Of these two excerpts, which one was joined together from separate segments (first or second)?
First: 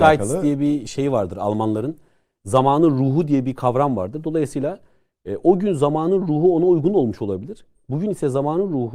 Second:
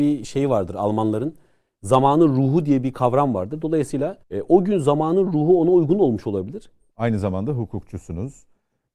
second